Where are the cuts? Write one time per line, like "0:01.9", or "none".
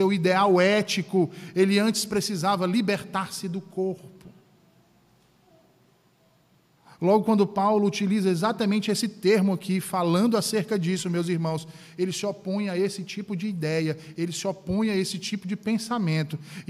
none